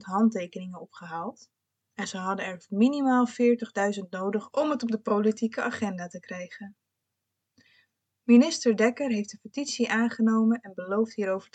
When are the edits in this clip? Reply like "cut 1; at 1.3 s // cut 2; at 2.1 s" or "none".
none